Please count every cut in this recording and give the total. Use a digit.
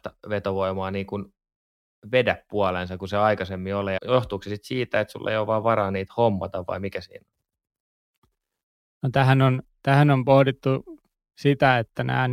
1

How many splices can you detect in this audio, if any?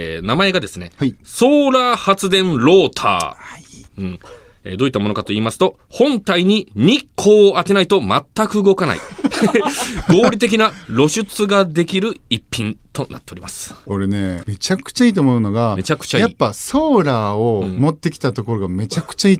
2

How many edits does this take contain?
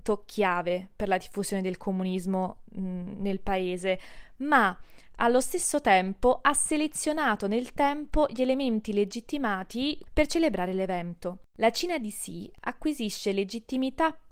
1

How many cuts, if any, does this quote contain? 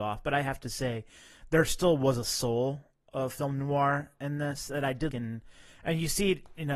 1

